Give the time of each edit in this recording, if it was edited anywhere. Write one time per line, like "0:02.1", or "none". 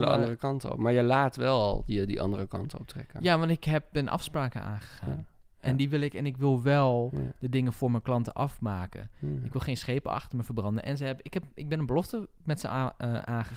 none

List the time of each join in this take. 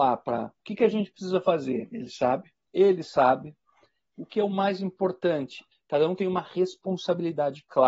0:02.7
0:05.7

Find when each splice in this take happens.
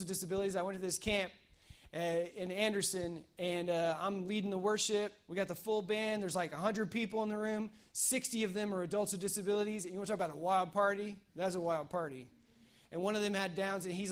0:11.3

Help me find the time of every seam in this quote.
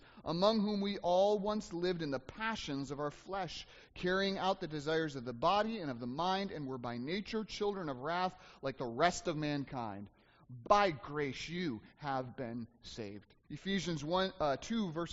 0:10.6
0:13.4

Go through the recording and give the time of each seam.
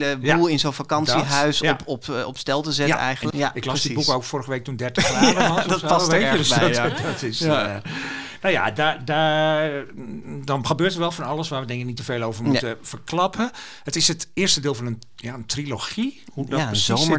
0:03.3

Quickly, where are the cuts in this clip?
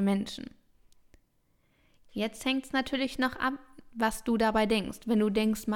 none

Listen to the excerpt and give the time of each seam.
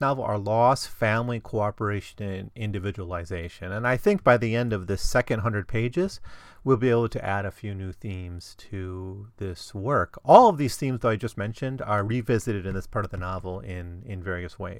none

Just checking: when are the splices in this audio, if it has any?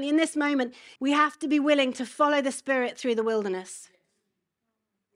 0:01.0

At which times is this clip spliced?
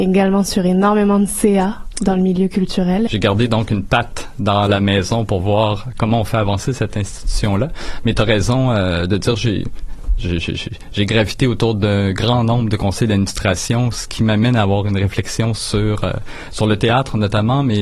0:03.1

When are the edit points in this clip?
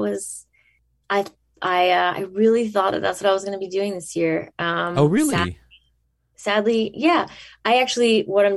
none

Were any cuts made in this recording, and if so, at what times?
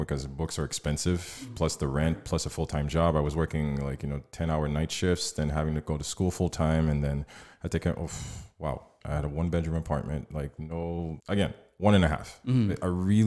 0:09.0
0:11.2

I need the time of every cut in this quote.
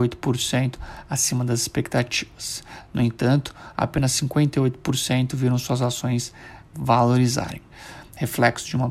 none

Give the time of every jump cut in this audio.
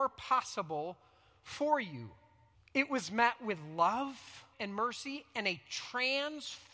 0:02.5
0:04.5

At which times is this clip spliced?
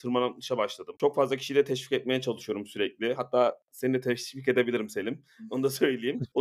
none

